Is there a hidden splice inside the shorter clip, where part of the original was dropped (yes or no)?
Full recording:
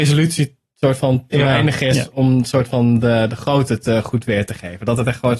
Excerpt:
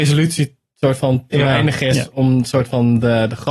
no